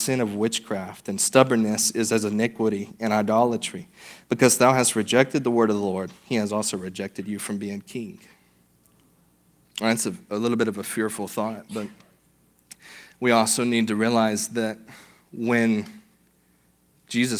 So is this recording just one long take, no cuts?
yes; 0 cuts

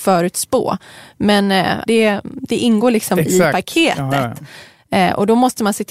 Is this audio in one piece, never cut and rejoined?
no; 1 cut; at 1.9 s

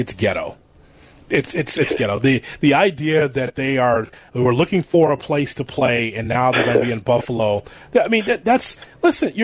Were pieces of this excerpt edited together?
no; 0 cuts

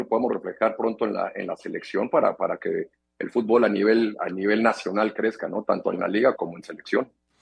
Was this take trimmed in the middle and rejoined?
yes; 1 cut; at 6.3 s

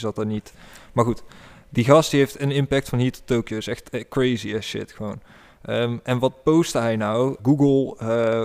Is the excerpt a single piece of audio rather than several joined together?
no; 1 cut; at 7.4 s

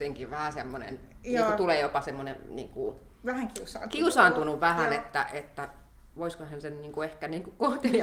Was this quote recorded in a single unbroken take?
yes; 0 cuts

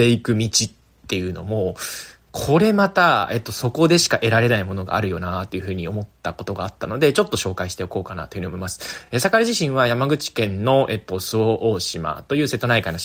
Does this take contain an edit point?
no; 0 cuts

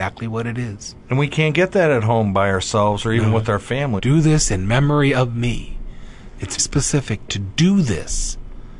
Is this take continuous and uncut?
no; 2 cuts; at 4.0 s, 6.6 s

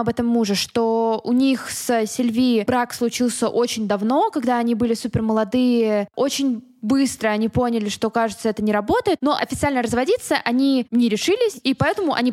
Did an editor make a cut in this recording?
no; 0 cuts

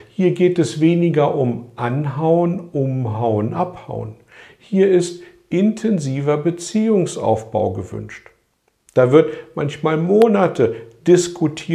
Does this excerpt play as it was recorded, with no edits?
yes; 0 cuts

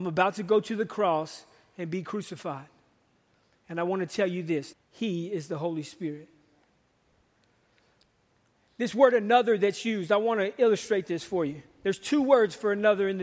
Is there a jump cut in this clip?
yes; 1 cut; at 4.7 s

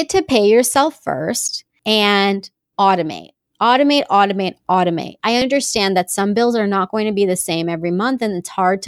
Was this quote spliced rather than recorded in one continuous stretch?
yes; 1 cut; at 5.2 s

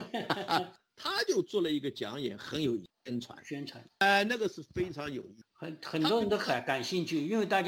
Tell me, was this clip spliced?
yes; 1 cut; at 2.9 s

